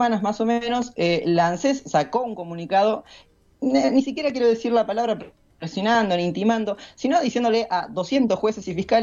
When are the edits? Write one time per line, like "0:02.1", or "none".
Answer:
none